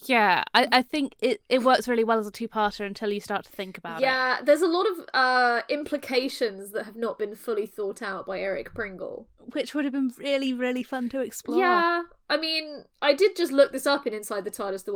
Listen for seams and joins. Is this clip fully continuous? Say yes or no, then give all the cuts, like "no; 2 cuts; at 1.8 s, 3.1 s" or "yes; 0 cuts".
yes; 0 cuts